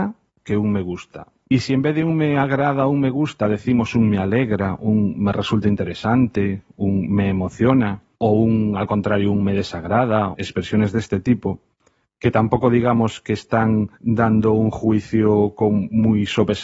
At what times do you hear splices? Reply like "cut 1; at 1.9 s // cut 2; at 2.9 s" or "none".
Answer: cut 1; at 1.4 s // cut 2; at 10.3 s // cut 3; at 13.9 s